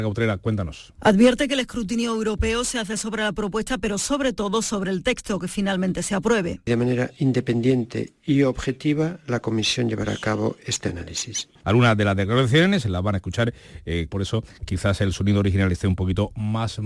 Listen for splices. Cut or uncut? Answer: cut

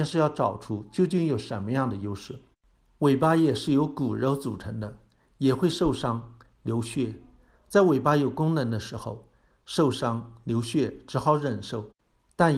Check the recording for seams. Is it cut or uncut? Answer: uncut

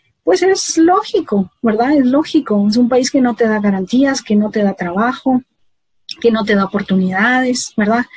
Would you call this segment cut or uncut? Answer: uncut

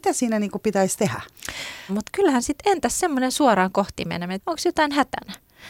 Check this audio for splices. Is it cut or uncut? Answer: cut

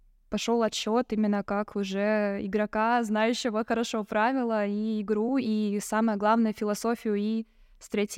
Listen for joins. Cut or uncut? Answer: uncut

